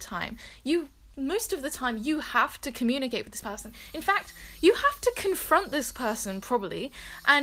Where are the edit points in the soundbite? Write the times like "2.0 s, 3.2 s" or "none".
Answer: none